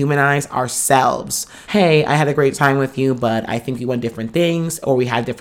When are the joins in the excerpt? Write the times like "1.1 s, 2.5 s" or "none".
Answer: 1.6 s